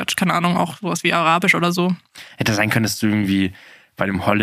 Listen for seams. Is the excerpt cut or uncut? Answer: uncut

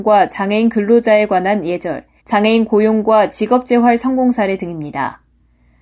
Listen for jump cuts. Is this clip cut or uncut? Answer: cut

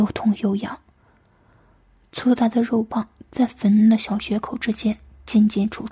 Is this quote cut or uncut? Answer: uncut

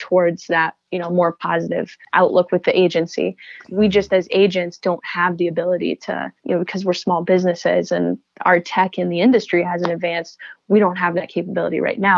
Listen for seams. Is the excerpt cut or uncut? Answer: cut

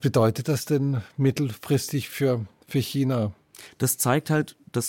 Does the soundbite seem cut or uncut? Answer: uncut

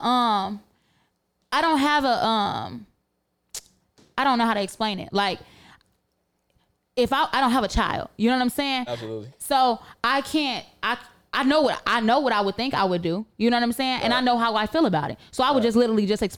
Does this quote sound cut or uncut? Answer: uncut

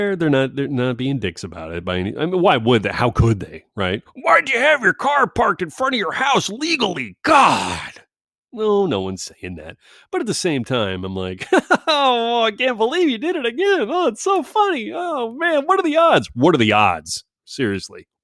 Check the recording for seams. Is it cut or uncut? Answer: uncut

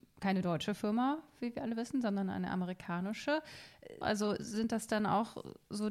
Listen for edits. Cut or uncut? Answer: cut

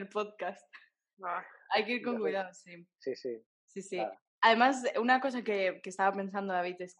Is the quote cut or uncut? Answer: cut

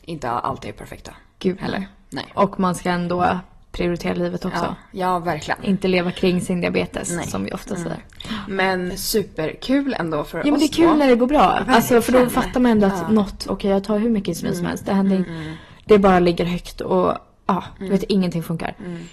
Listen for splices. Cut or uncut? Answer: cut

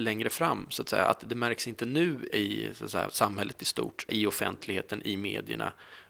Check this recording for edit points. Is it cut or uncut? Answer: cut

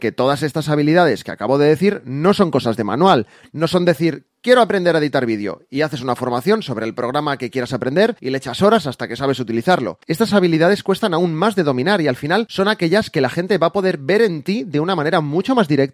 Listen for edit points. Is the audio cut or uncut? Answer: cut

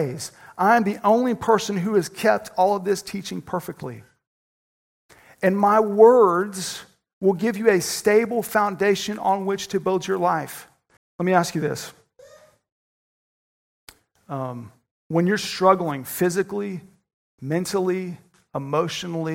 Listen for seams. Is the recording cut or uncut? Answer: cut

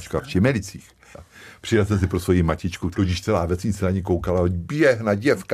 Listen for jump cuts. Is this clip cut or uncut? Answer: cut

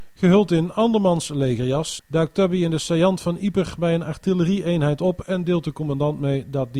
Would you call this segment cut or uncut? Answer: cut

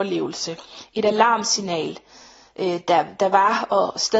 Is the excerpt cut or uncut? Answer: uncut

